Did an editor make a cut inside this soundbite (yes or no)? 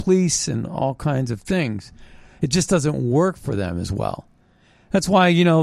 no